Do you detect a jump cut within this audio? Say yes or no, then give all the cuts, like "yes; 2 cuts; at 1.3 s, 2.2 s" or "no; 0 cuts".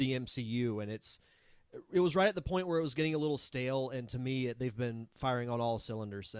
no; 0 cuts